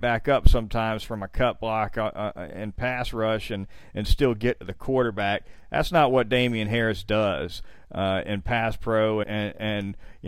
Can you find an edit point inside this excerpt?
yes; 2 cuts; at 7.8 s, 9.2 s

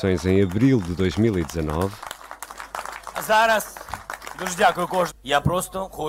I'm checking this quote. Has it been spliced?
yes; 1 cut; at 5.1 s

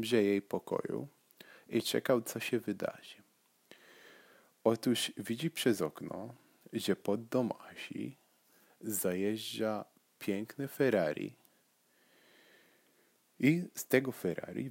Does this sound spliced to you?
no; 0 cuts

